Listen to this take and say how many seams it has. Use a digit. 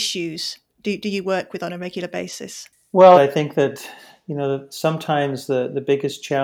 1